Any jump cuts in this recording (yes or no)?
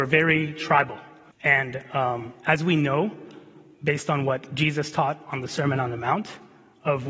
yes